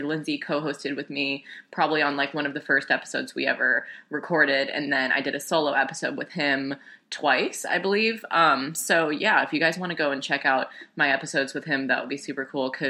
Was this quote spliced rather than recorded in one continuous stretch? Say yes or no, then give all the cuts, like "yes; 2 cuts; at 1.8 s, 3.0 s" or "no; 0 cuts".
no; 0 cuts